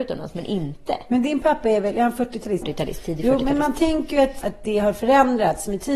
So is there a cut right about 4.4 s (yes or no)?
yes